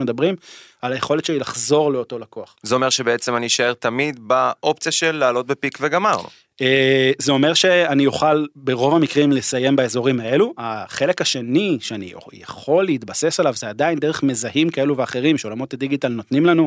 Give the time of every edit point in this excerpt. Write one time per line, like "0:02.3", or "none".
none